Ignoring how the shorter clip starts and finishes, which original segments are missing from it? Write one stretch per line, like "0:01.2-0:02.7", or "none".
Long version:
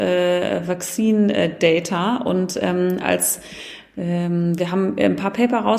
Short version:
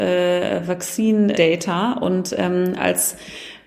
0:01.3-0:01.6